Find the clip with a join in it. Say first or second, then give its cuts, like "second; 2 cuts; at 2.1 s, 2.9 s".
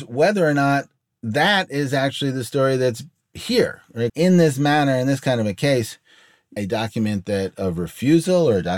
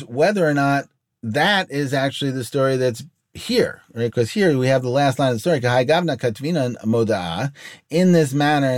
first; 2 cuts; at 4.1 s, 6.6 s